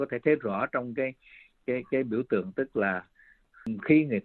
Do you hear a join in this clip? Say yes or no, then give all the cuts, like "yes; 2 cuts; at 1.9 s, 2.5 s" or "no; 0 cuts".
no; 0 cuts